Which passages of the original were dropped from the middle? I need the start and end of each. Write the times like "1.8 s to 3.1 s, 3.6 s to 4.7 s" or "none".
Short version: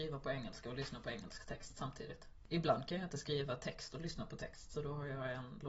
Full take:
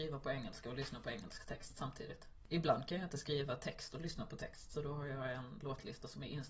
none